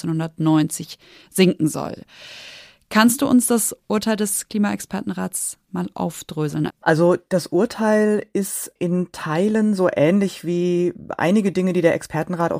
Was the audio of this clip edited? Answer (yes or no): yes